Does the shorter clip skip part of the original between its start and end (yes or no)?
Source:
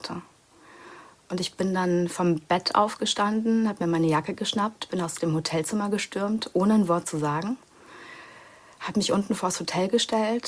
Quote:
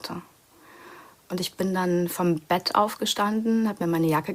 no